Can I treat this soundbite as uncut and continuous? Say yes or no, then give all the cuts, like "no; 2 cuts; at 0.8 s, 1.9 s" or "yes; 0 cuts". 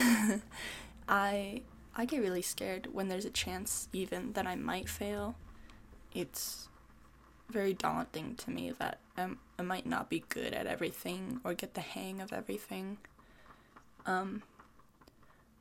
yes; 0 cuts